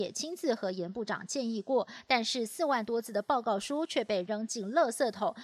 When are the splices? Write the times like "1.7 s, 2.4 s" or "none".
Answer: none